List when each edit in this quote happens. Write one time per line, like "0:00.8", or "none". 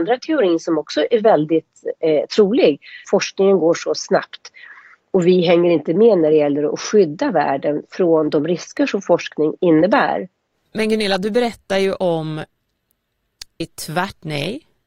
0:03.0